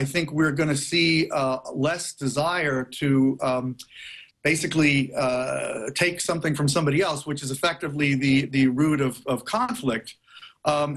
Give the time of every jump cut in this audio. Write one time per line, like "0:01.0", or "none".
0:04.3